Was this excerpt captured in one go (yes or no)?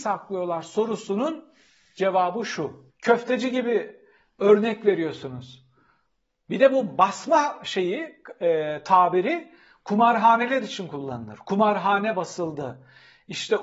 no